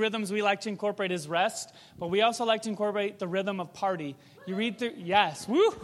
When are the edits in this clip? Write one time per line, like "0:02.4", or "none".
none